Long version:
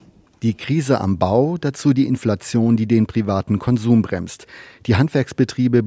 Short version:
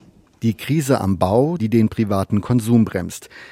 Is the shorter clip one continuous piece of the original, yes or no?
no